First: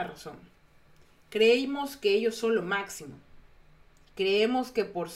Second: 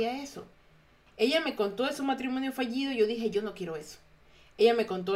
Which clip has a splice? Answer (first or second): second